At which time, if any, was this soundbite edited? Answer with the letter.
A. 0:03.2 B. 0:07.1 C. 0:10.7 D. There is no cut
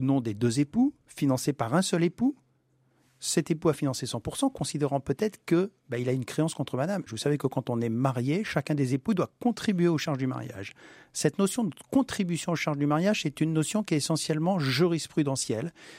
B